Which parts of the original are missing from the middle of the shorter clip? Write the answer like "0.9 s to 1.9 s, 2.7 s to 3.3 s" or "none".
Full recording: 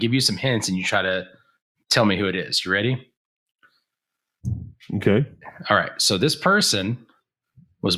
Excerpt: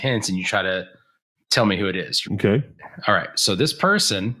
2.6 s to 4.9 s

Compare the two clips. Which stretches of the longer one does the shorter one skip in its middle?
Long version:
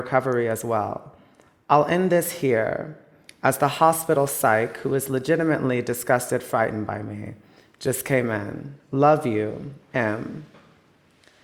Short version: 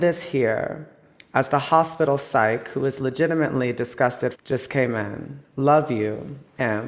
6.4 s to 7.7 s

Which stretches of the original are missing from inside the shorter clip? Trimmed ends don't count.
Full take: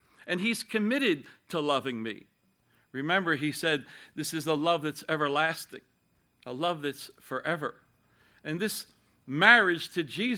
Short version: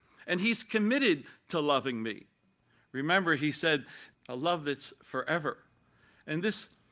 4.1 s to 6.3 s

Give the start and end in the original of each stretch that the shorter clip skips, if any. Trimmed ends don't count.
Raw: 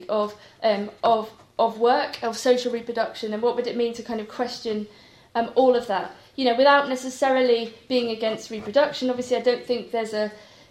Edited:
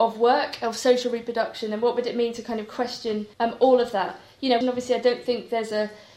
4.9 s to 5.3 s, 6.6 s to 9.0 s

